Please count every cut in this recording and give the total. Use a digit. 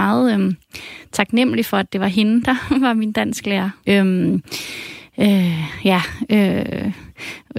1